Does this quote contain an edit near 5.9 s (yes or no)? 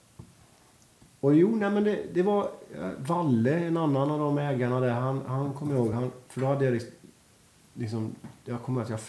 no